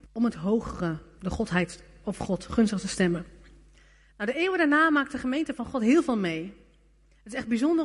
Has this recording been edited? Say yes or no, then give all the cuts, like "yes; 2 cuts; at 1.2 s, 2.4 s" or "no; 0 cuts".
yes; 1 cut; at 1.2 s